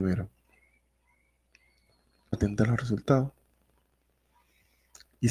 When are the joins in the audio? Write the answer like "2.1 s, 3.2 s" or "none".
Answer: 2.3 s